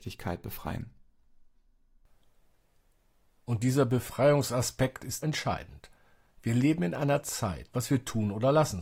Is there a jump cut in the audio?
yes; 2 cuts; at 5.2 s, 7.7 s

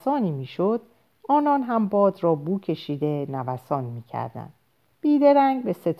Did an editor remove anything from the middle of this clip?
yes; 1 cut; at 4.9 s

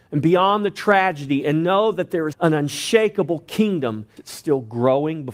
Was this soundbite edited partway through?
yes; 2 cuts; at 2.3 s, 4.2 s

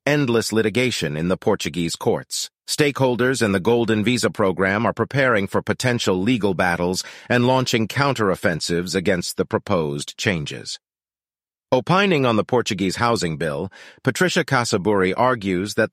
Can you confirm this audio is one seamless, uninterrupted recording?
yes; 0 cuts

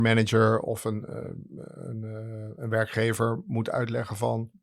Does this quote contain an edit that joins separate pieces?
no; 0 cuts

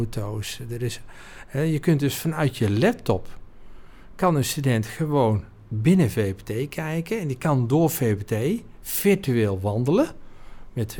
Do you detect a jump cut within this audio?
no; 0 cuts

